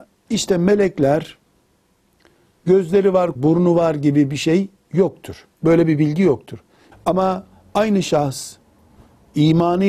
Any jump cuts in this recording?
yes; 3 cuts; at 3.4 s, 5.5 s, 6.9 s

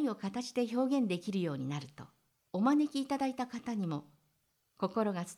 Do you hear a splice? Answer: yes; 1 cut; at 2.5 s

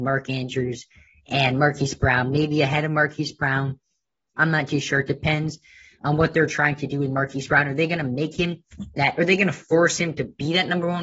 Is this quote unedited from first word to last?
yes; 0 cuts

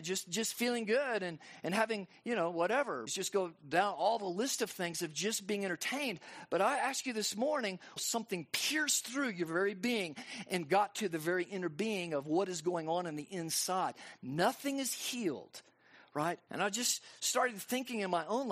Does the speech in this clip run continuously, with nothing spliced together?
no; 3 cuts; at 3.1 s, 8.0 s, 16.5 s

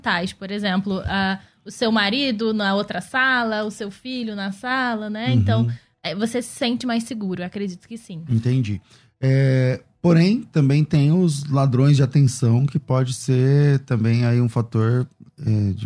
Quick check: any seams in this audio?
no; 0 cuts

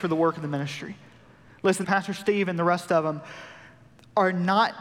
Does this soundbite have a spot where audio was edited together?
yes; 1 cut; at 1.8 s

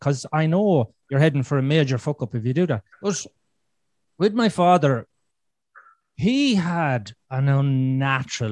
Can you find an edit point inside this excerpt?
yes; 1 cut; at 2.9 s

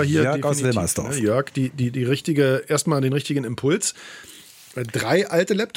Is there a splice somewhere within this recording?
no; 0 cuts

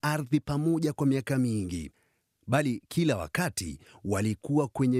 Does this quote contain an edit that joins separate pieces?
no; 0 cuts

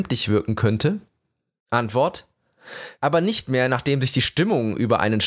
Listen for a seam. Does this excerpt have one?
yes; 1 cut; at 3.0 s

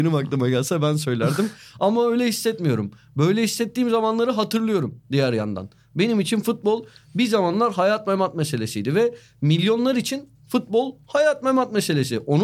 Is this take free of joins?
yes; 0 cuts

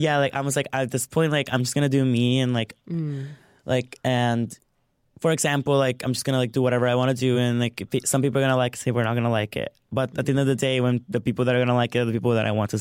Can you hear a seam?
no; 0 cuts

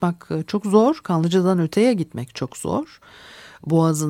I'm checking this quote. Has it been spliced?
no; 0 cuts

